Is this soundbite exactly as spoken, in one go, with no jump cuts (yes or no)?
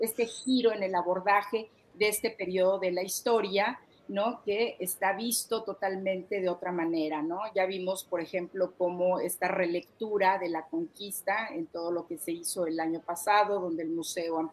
yes